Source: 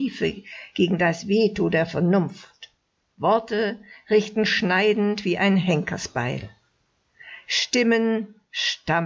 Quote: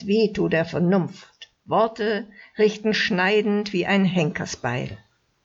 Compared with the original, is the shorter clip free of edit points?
no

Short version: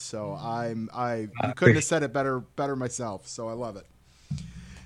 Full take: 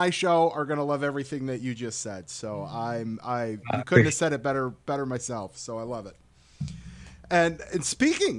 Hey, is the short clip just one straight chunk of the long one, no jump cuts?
yes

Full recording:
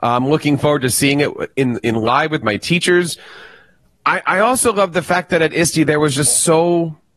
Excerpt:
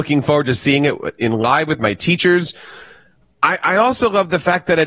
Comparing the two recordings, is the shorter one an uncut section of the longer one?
no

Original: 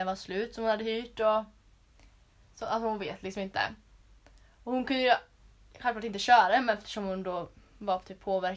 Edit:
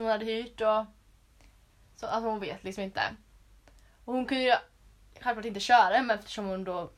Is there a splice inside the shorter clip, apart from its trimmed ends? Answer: no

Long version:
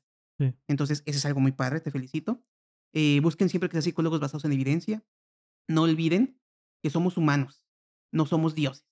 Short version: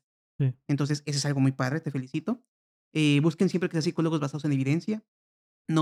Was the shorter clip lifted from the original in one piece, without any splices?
yes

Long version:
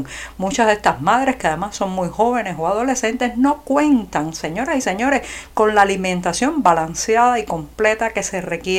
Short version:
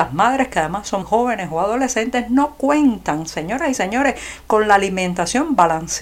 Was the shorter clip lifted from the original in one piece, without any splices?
no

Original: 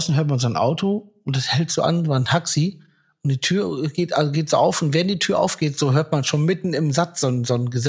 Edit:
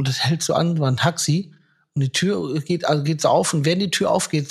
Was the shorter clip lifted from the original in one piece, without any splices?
yes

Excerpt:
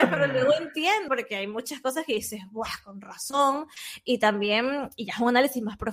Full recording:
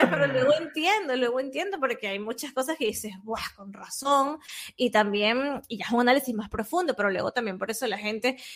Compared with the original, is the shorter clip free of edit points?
no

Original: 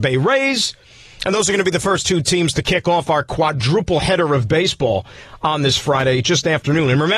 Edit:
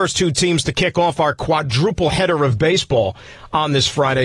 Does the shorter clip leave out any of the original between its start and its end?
no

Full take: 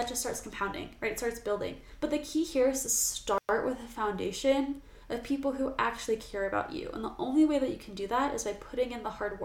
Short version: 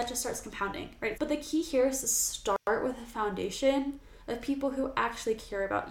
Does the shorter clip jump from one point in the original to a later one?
yes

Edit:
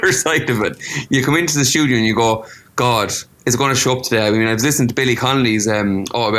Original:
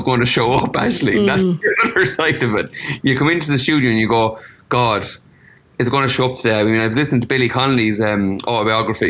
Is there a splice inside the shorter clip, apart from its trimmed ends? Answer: yes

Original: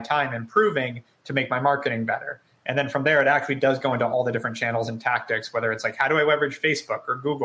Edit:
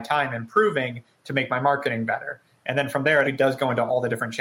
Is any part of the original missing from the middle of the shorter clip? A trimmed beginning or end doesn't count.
yes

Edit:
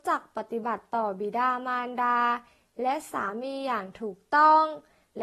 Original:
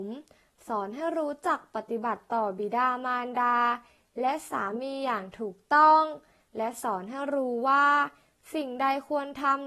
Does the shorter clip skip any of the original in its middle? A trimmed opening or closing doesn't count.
no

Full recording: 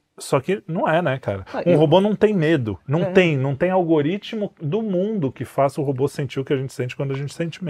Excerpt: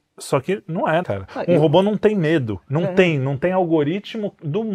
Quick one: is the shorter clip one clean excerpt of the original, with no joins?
no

